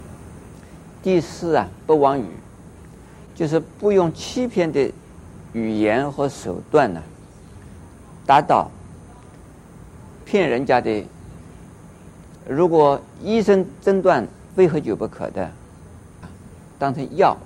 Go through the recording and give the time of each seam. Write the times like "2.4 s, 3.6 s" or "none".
12.3 s, 16.2 s